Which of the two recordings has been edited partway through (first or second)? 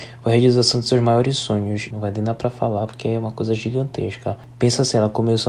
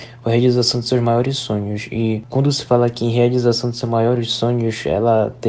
first